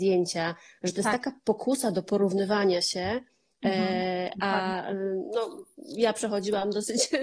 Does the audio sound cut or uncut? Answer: uncut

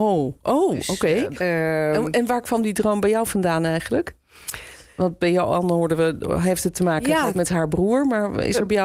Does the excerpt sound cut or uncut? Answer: cut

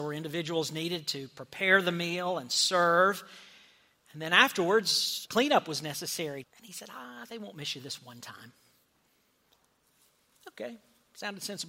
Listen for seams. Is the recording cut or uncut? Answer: cut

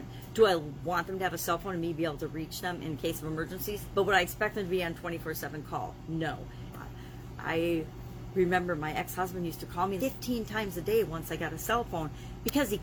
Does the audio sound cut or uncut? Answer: cut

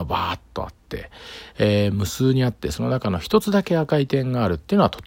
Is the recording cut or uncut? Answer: uncut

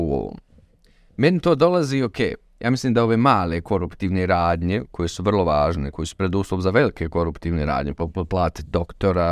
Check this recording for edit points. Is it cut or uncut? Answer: uncut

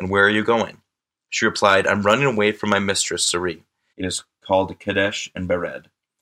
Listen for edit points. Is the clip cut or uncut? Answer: cut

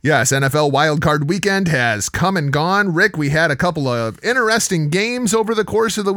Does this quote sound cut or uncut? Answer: uncut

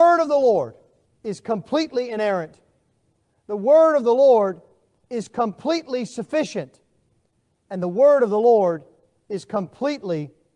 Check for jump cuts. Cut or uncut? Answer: uncut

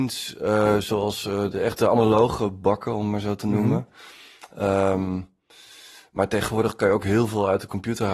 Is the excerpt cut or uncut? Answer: uncut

